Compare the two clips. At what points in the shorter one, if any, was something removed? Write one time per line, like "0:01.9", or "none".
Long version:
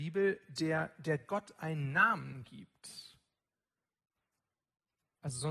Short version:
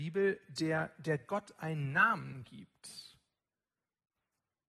none